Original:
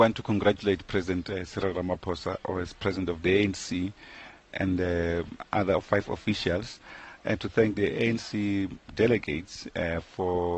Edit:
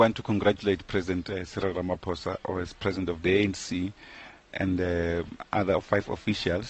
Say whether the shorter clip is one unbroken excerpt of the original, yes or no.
yes